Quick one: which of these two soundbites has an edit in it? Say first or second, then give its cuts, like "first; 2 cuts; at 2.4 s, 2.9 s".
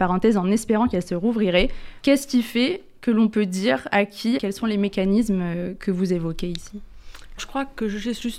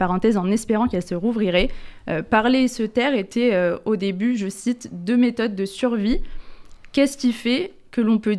first; 3 cuts; at 2.0 s, 4.4 s, 7.4 s